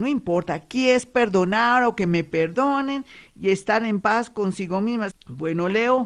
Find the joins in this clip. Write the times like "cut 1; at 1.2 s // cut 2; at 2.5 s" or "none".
cut 1; at 5.1 s

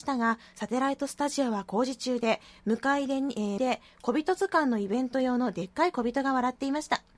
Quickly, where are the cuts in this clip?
cut 1; at 3.6 s

